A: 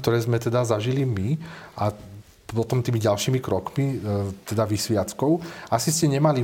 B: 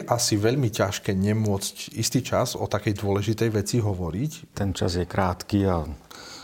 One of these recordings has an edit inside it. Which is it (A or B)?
B